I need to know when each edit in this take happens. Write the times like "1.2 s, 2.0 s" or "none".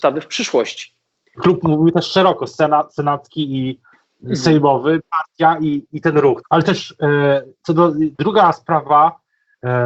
1.4 s, 6.4 s, 8.1 s